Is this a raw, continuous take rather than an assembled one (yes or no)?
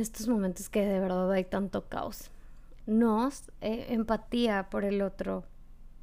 no